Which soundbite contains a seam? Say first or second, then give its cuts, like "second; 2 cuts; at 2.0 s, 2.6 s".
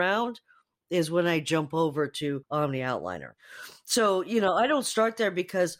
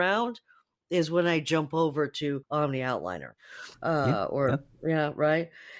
second; 1 cut; at 3.7 s